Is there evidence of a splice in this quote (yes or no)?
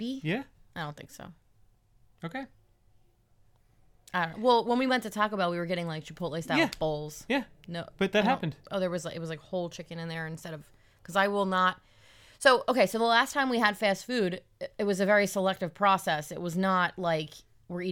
no